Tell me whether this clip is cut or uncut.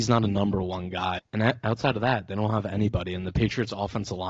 cut